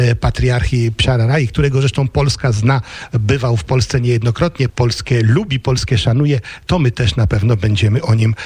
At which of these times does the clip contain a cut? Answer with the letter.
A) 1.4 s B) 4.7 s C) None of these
B